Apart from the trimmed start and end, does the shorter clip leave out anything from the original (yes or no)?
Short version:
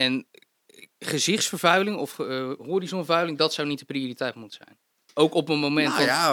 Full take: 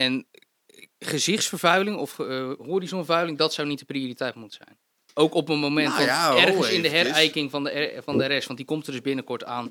no